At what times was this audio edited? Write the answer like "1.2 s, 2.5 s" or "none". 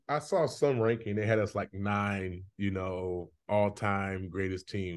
none